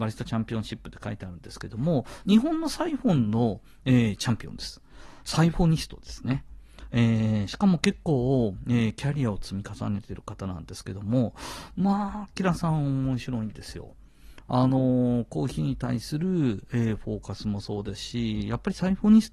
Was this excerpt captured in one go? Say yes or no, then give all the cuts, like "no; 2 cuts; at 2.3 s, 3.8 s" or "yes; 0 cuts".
yes; 0 cuts